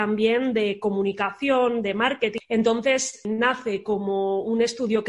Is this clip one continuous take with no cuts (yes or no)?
no